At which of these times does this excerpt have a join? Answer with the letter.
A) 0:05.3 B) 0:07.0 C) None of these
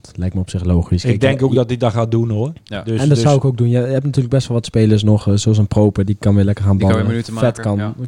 C